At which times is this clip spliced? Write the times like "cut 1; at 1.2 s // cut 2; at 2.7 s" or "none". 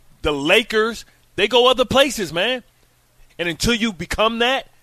cut 1; at 3.3 s